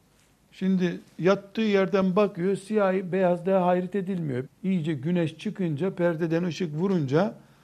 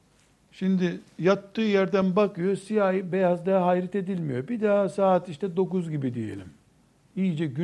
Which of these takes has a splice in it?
first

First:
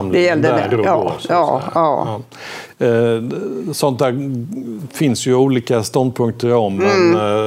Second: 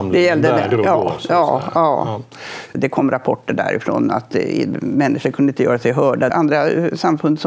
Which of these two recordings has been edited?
second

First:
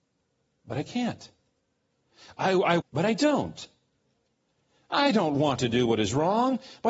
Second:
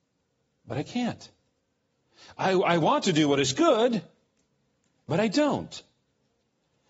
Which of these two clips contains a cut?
first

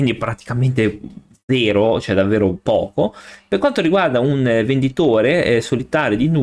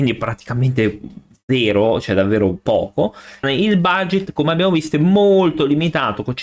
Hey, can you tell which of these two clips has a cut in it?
second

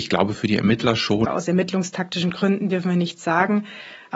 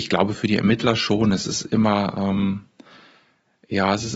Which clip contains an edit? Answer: first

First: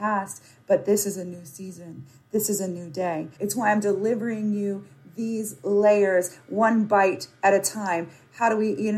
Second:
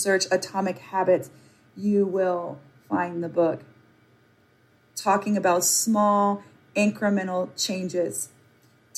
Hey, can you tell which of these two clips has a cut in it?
first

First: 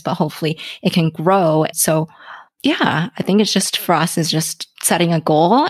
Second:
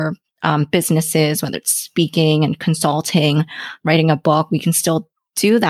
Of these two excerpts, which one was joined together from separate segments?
first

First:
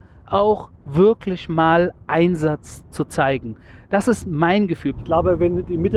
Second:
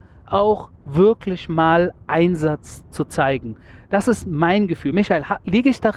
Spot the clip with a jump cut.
first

